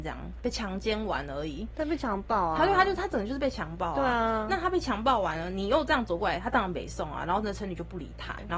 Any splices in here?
no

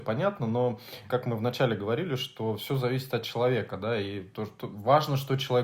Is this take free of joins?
no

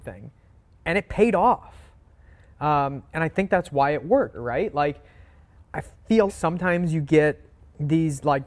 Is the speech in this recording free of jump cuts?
no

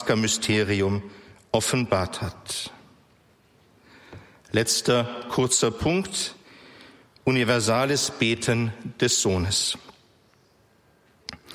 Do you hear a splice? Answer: no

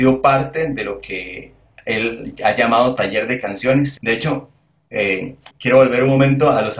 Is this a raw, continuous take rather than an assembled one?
no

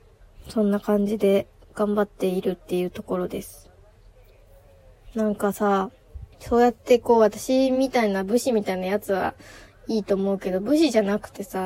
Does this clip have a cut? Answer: yes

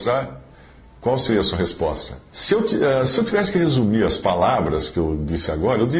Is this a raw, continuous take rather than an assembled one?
no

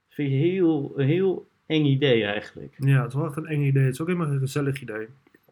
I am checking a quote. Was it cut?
no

